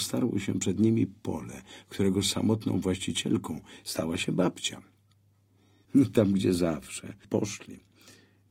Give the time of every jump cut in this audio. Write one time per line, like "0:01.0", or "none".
0:05.8
0:07.2